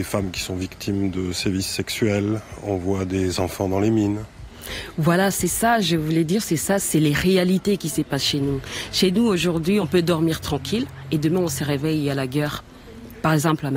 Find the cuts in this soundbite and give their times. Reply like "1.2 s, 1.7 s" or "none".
none